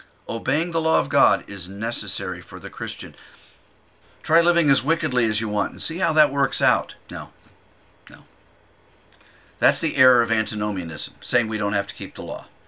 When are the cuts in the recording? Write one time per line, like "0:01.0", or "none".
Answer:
0:04.0
0:07.0